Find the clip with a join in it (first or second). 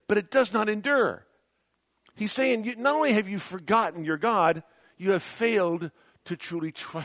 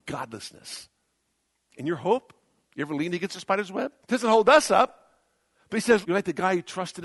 second